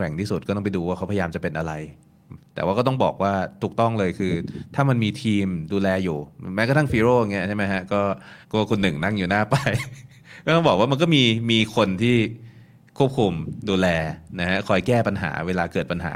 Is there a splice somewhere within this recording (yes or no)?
yes